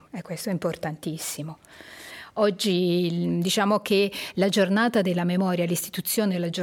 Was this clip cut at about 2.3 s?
no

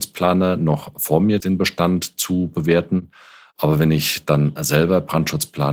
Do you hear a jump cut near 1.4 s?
yes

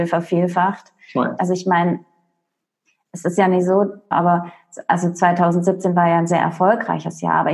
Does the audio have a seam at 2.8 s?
no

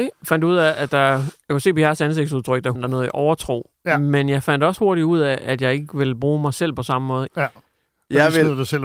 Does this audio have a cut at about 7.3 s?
yes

